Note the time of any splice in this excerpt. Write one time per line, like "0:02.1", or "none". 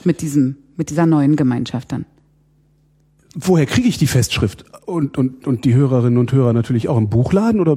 none